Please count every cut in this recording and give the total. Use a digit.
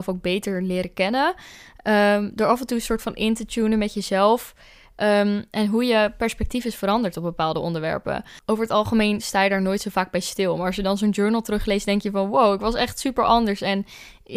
1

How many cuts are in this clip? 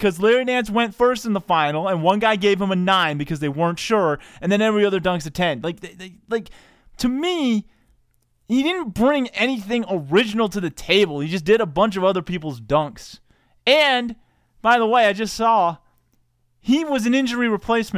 0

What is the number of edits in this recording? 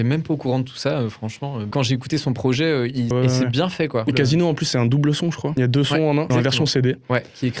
2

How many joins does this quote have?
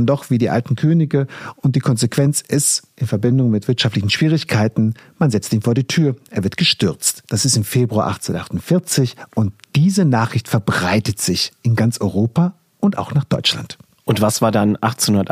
0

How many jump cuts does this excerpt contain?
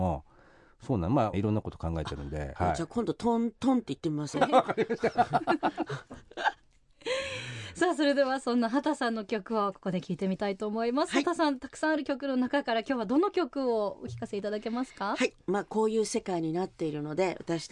3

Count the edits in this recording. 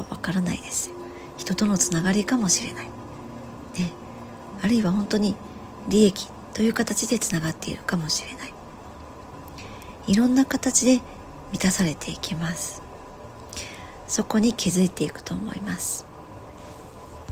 0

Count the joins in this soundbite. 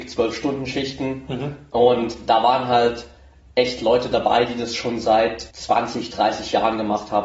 1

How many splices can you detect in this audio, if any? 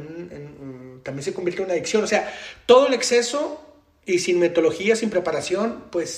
0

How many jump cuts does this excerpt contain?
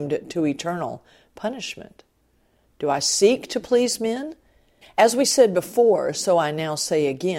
2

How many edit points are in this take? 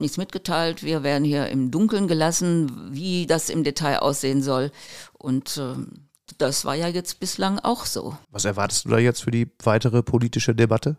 1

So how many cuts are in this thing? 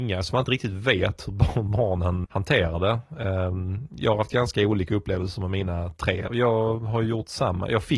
2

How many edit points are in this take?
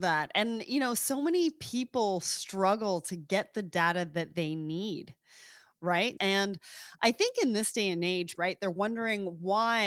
2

